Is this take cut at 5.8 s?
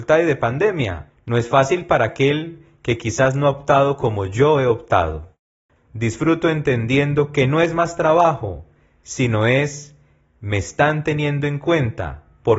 yes; 1 cut; at 5.8 s

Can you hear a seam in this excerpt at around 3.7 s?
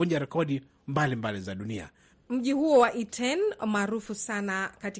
no; 1 cut; at 2.1 s

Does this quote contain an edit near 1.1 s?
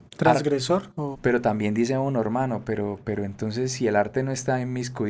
yes; 1 cut; at 1.1 s

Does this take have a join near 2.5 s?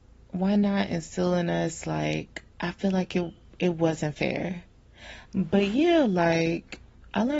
yes; 2 cuts; at 2.5 s, 5.2 s

